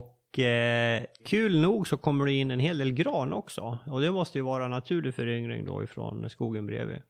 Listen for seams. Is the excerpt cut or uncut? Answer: cut